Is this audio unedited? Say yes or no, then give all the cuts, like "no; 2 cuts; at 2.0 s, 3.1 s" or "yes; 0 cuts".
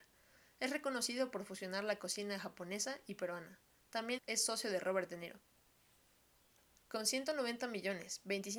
no; 1 cut; at 4.2 s